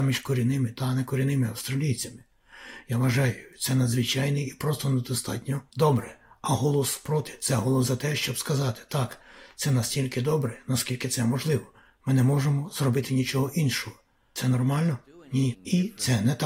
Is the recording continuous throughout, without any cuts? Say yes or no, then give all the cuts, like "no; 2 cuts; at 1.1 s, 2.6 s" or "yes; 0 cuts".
yes; 0 cuts